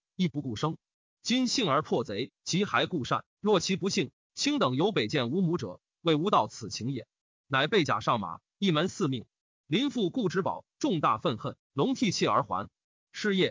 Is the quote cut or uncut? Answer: cut